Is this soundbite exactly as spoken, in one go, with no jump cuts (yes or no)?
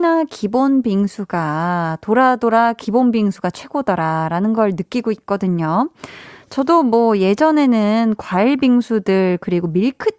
yes